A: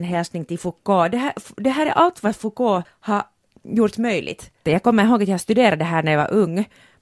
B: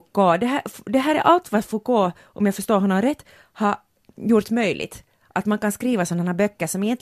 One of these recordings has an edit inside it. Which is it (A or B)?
A